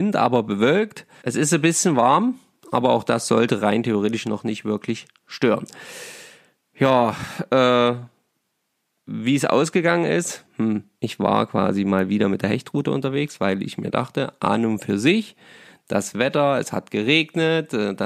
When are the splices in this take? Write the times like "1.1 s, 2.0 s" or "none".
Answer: 1.2 s, 11.0 s